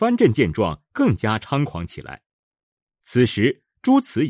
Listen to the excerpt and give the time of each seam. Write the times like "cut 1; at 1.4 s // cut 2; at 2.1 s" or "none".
cut 1; at 2.9 s